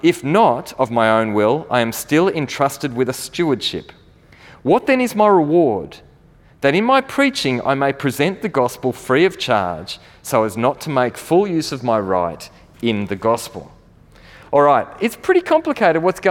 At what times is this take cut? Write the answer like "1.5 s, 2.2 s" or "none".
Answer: none